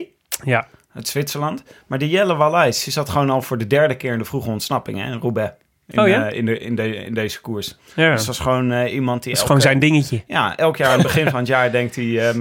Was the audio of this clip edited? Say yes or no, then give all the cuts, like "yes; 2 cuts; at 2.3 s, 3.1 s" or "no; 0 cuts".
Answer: no; 0 cuts